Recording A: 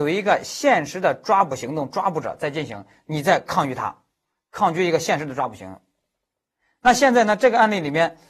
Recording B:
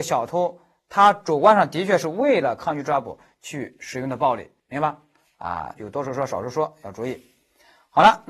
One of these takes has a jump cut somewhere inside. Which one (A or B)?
B